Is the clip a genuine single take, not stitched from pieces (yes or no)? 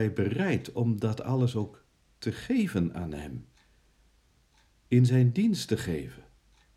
yes